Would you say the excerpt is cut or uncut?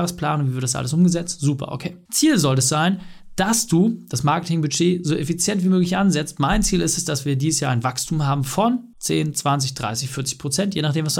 uncut